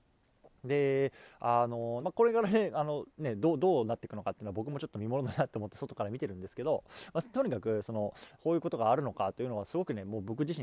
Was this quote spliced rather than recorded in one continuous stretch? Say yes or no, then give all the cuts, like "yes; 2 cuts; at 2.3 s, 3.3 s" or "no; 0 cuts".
yes; 2 cuts; at 2.0 s, 8.4 s